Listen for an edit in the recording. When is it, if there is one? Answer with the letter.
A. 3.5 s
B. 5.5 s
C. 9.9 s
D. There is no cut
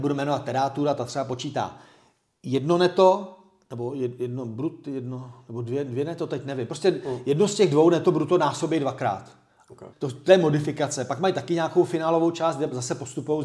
C